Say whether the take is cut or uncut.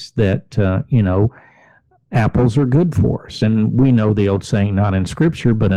uncut